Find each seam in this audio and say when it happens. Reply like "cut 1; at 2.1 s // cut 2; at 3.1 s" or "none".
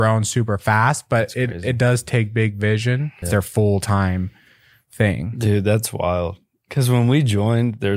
cut 1; at 3.2 s

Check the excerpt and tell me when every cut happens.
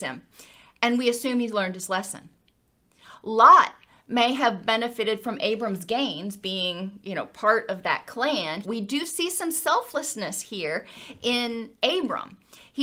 cut 1; at 8.6 s

